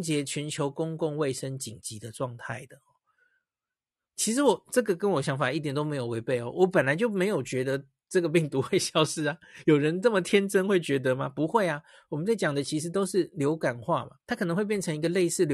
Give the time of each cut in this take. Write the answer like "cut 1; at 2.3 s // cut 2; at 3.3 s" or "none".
cut 1; at 14.2 s